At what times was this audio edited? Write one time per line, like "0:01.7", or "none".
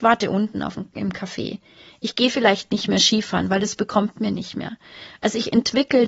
none